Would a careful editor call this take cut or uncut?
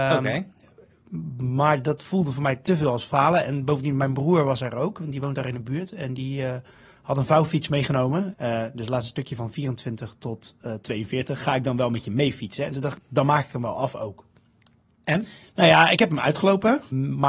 cut